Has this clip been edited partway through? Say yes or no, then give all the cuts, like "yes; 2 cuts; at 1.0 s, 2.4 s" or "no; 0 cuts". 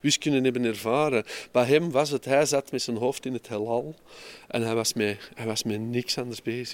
no; 0 cuts